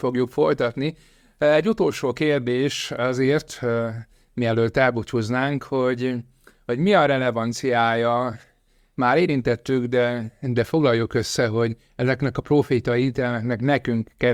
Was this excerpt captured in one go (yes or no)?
yes